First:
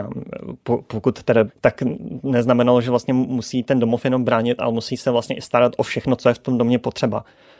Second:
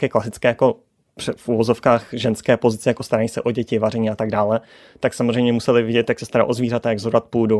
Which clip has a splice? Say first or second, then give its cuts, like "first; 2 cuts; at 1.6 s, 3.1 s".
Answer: first; 1 cut; at 1.5 s